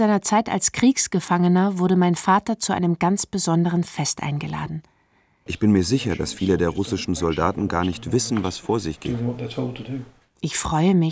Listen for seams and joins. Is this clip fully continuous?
no; 1 cut; at 5.5 s

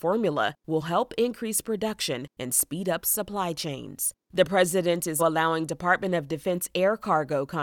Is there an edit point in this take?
yes; 1 cut; at 5.2 s

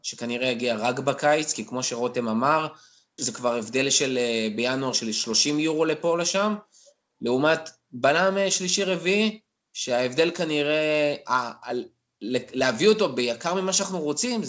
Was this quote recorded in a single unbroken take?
no; 1 cut; at 3.2 s

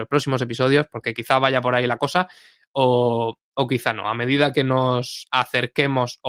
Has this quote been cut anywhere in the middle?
no; 0 cuts

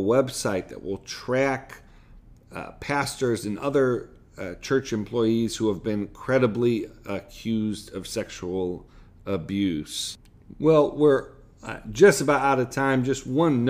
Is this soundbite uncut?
yes; 0 cuts

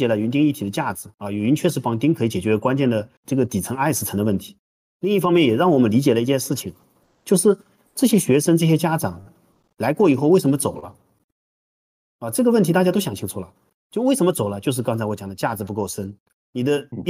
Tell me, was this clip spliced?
yes; 1 cut; at 3.2 s

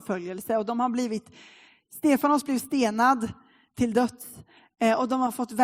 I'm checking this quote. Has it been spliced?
no; 0 cuts

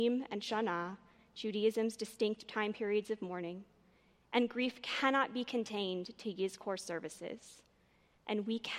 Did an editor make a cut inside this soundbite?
no; 0 cuts

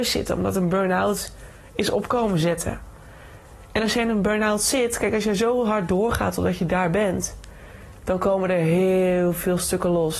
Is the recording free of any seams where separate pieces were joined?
yes; 0 cuts

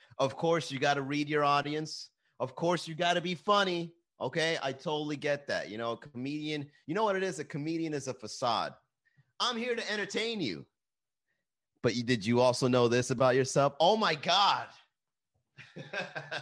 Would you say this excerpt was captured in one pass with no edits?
yes; 0 cuts

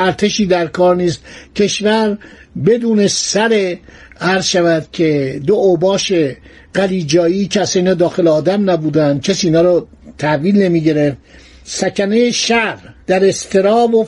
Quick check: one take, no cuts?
no; 1 cut; at 13.0 s

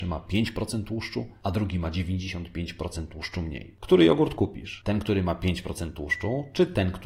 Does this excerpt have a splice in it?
no; 0 cuts

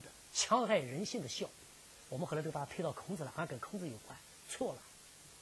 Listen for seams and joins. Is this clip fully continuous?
yes; 0 cuts

